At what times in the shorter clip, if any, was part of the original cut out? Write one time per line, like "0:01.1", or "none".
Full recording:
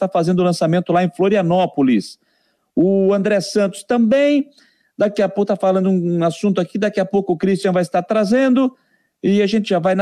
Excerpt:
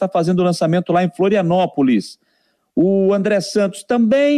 none